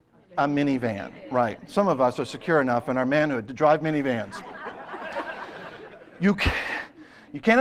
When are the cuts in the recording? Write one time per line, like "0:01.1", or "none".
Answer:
none